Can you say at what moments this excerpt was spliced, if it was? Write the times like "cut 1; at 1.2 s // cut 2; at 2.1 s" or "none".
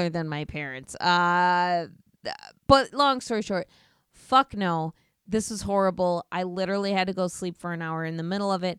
none